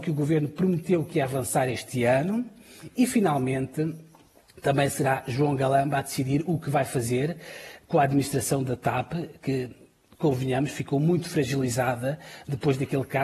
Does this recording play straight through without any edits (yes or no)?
yes